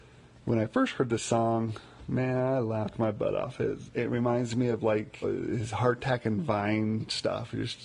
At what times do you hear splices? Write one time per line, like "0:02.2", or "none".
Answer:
0:03.9
0:05.2

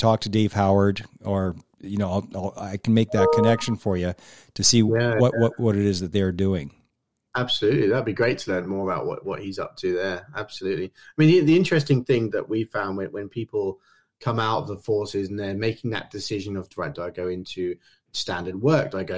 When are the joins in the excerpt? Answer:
0:12.3
0:16.9

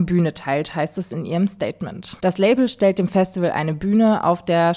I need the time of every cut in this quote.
0:02.2

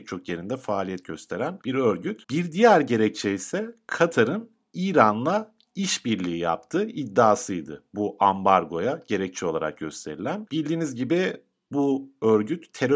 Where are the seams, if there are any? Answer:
0:02.2
0:10.5

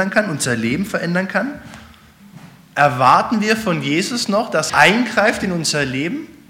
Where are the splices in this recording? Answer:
0:04.7

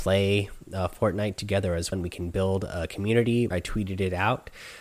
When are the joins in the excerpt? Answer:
0:01.9
0:03.5

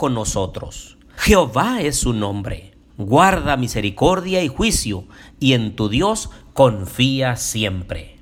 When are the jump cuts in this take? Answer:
0:01.2
0:02.9

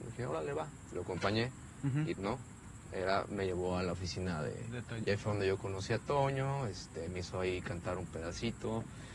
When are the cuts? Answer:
0:02.2
0:05.0

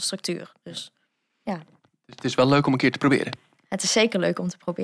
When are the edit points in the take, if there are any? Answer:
0:01.5

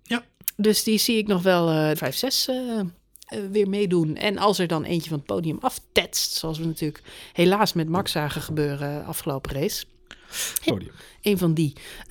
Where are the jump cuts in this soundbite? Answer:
0:01.9
0:10.7

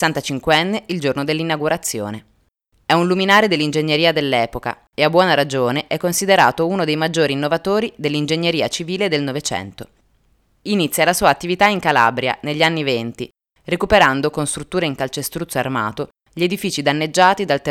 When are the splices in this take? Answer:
none

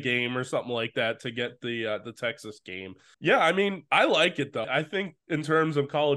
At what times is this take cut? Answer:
0:03.1
0:04.6

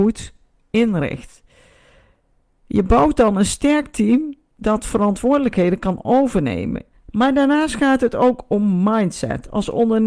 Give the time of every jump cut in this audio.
0:06.9

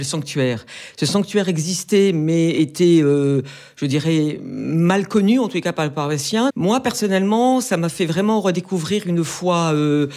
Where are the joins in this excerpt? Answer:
0:06.5

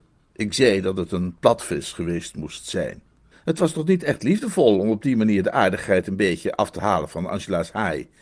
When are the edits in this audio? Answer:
0:03.3

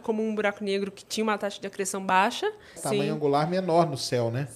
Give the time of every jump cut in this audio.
0:02.8

